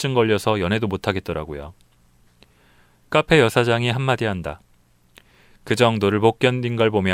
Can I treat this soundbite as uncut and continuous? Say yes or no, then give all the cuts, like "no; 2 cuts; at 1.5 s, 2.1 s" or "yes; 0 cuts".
yes; 0 cuts